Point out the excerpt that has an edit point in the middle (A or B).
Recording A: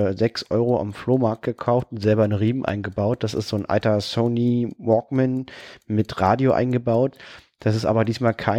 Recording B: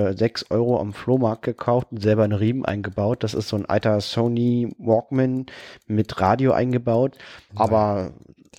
B